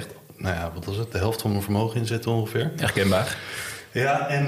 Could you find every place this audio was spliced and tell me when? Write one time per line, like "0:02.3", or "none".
none